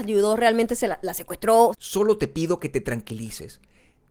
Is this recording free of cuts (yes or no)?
no